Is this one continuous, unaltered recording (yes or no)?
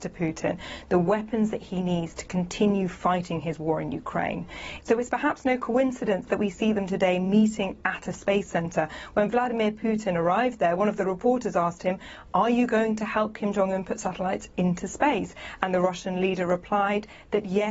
no